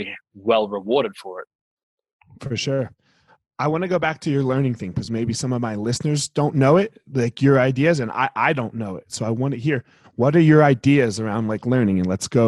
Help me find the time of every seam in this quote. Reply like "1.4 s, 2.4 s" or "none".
none